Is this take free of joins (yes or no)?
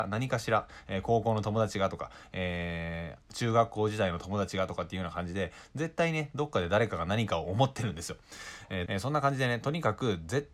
no